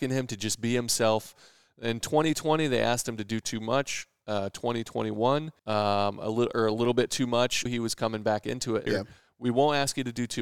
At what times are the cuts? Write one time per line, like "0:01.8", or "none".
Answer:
0:05.6
0:07.7
0:08.9